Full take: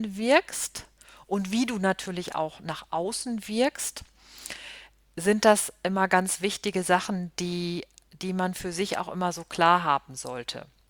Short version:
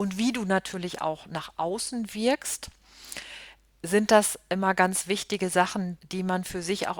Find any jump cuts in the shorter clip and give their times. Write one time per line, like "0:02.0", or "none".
0:06.0